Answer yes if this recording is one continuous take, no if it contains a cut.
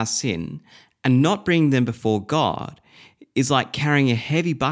yes